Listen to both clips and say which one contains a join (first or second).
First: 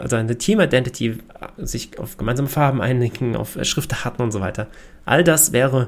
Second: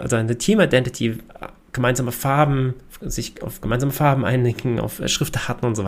first